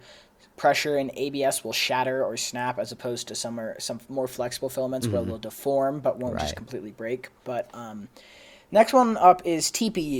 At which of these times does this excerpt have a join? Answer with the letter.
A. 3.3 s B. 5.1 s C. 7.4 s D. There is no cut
C